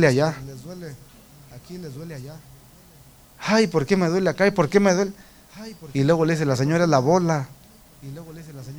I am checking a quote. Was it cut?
no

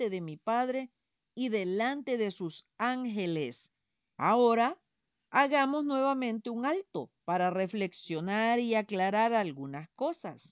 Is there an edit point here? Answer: yes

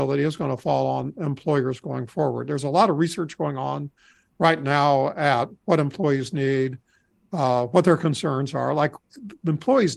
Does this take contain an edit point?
no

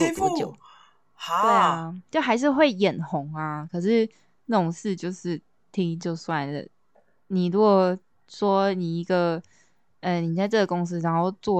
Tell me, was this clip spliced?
yes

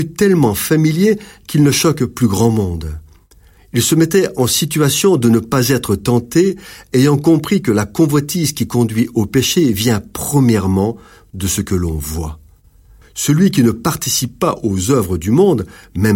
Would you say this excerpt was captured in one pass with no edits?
no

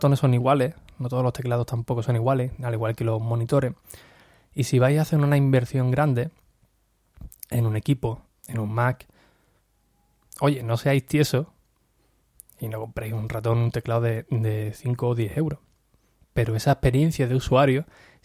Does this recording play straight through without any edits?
no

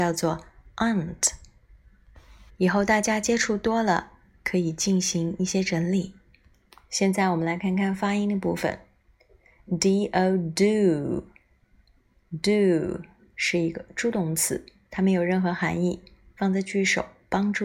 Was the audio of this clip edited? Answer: no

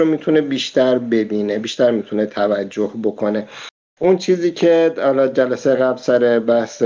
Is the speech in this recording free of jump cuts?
yes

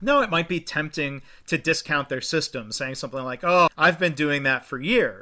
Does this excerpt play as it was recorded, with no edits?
no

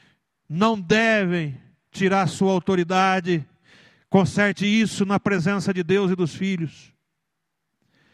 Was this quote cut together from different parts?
no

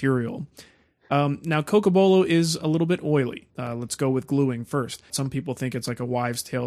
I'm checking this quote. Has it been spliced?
yes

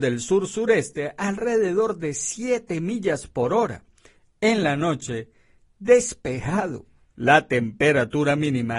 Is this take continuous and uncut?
yes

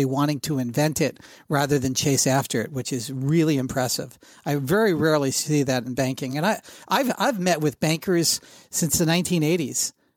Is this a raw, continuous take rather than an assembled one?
yes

